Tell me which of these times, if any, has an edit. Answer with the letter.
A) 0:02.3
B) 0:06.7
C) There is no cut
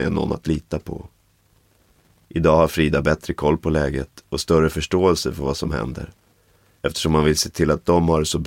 B